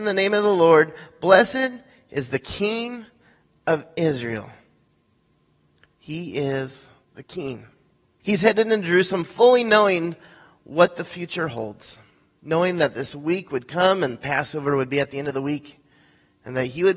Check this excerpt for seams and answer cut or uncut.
cut